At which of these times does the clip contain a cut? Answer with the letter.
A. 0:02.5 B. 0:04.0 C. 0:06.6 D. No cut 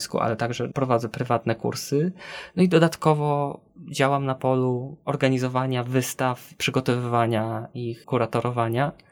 D